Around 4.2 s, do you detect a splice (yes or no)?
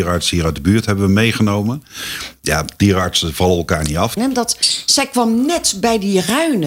yes